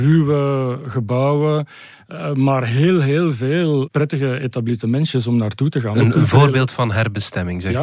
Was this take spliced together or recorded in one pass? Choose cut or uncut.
uncut